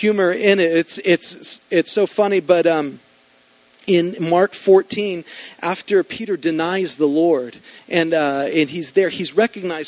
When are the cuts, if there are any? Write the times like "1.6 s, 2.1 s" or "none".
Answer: none